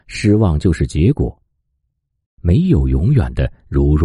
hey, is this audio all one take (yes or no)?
no